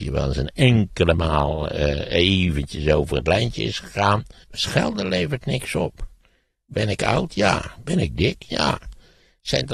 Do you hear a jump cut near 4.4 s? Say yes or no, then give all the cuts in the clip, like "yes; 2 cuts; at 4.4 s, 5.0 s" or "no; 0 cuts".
yes; 1 cut; at 4.4 s